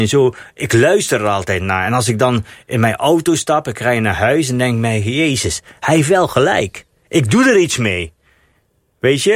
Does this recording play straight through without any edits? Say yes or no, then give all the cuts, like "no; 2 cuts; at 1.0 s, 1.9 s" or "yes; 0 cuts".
yes; 0 cuts